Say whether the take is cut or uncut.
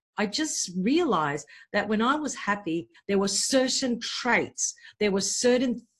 uncut